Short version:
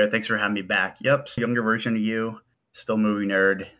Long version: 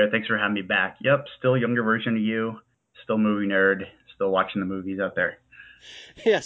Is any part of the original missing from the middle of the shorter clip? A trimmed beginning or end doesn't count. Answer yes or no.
yes